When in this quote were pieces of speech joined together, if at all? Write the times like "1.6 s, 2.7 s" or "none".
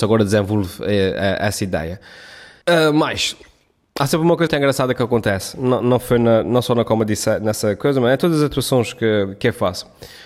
2.6 s, 4.5 s